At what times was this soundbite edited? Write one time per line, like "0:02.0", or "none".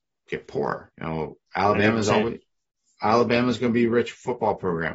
0:00.9